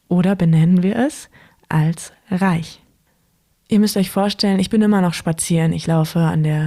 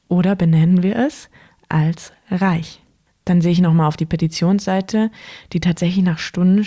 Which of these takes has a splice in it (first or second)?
second